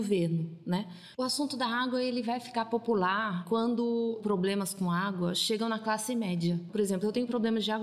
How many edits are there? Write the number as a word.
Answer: one